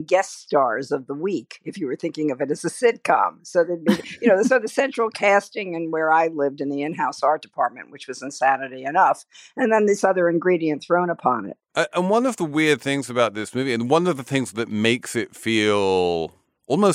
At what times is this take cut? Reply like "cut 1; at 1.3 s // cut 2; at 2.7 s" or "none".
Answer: none